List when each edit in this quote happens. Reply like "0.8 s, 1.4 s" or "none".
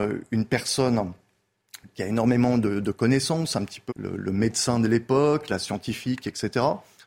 3.9 s

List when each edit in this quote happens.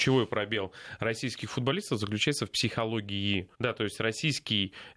3.5 s

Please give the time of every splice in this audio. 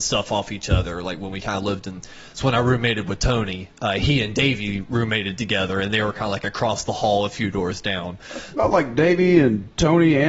none

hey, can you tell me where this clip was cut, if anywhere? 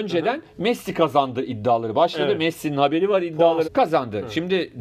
3.6 s

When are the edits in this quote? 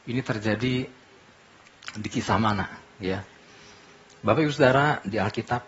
none

